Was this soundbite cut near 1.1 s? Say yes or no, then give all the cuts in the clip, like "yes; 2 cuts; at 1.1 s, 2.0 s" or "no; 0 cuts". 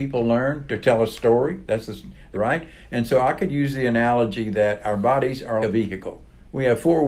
no; 2 cuts; at 2.3 s, 5.6 s